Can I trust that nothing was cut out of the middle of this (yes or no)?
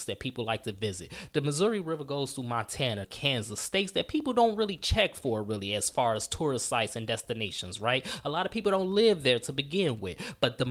no